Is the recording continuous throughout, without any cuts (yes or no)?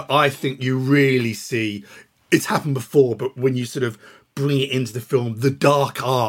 yes